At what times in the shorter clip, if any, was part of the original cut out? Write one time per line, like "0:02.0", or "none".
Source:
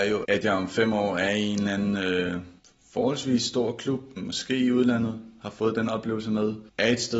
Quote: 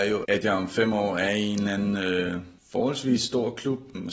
0:02.6